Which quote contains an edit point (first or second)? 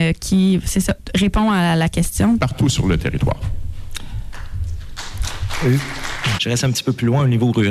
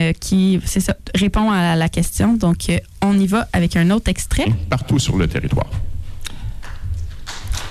first